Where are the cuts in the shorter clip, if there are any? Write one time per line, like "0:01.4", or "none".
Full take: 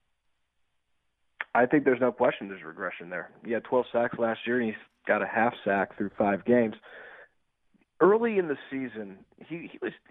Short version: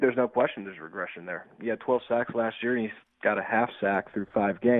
none